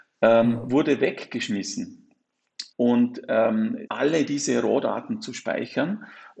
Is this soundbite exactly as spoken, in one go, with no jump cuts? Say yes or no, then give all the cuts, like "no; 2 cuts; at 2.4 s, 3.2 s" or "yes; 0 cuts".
no; 2 cuts; at 2.7 s, 3.9 s